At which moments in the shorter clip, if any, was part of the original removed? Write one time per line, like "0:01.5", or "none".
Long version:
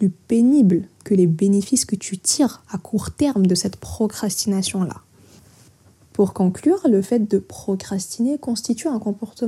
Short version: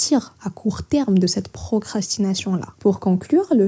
0:02.7

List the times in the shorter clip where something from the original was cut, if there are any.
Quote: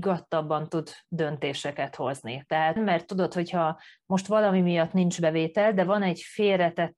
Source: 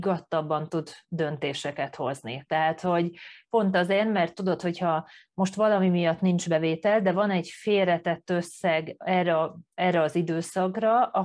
0:02.8

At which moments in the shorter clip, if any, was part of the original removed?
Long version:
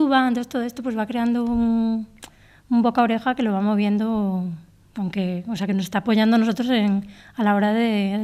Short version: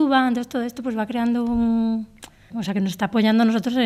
0:02.5

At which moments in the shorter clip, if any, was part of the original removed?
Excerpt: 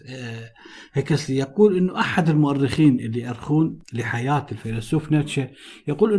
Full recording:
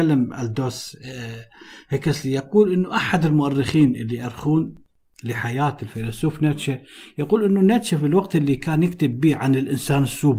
0:03.8

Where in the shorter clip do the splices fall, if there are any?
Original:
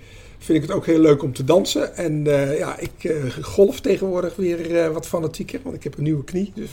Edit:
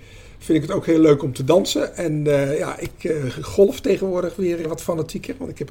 0:04.6

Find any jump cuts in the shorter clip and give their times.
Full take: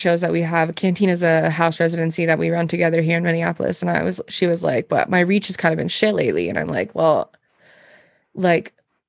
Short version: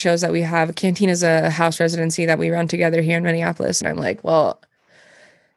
0:03.8

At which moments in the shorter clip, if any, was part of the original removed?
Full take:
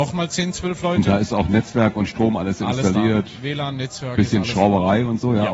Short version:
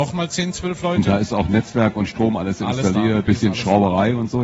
0:03.3

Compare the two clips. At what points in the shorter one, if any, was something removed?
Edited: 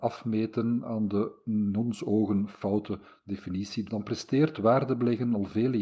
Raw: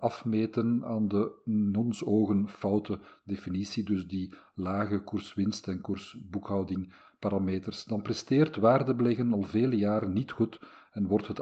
0:03.9

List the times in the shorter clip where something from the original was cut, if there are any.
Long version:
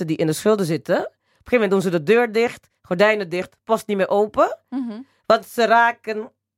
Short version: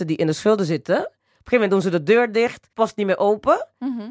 0:02.7

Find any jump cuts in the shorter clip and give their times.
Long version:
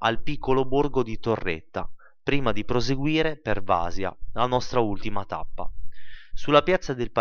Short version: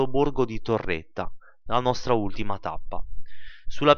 0:01.7

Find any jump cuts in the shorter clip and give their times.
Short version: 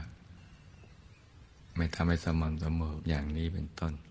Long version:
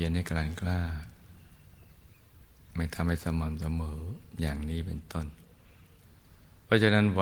0:03.0

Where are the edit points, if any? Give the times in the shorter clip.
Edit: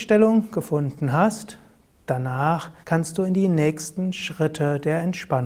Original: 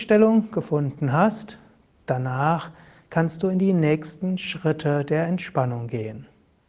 0:02.8

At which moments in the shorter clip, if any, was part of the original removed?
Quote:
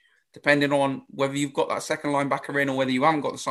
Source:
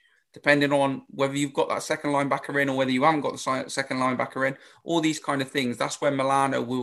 none

